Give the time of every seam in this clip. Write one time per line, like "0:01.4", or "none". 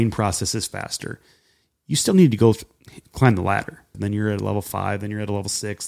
0:03.9